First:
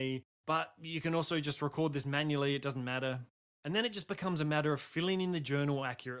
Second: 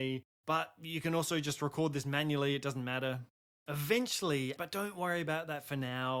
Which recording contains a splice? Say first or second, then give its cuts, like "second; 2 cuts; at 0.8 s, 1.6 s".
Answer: second; 2 cuts; at 3.5 s, 4.6 s